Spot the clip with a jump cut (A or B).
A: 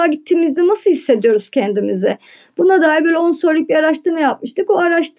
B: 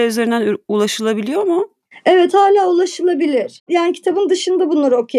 B